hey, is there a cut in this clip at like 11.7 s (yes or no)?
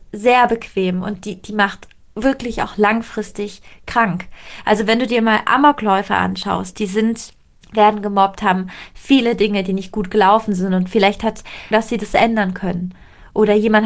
yes